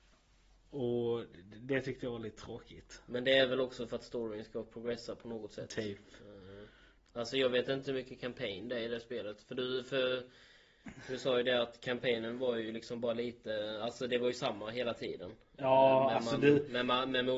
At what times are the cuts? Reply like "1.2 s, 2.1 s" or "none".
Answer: none